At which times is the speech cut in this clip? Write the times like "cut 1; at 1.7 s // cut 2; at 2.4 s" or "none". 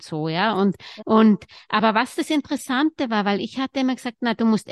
cut 1; at 1.0 s